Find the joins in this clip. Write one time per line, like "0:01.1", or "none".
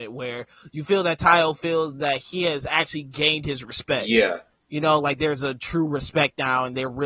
none